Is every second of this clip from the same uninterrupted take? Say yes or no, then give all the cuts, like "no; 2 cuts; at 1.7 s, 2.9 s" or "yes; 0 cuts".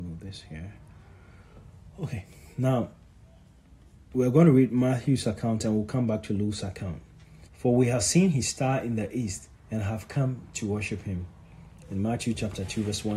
no; 3 cuts; at 7.5 s, 9.6 s, 11.8 s